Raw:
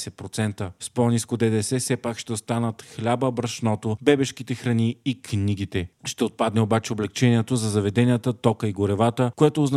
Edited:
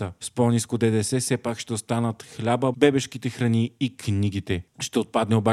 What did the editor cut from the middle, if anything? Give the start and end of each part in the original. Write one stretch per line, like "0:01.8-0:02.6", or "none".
0:03.3-0:04.0